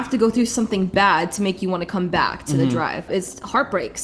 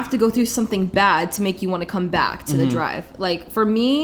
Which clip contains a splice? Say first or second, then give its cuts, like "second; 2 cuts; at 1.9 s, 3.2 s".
first; 1 cut; at 3.1 s